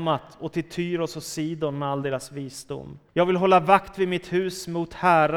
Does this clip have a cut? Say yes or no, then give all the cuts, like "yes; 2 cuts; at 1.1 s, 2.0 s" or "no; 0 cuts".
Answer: yes; 1 cut; at 3.1 s